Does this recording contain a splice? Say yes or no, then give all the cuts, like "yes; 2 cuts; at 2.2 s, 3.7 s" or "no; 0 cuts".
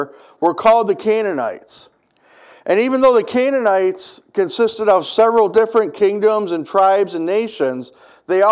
no; 0 cuts